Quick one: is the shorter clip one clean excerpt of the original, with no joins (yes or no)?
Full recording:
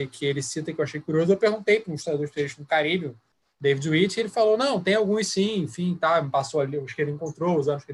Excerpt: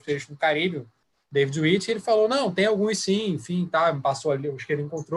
yes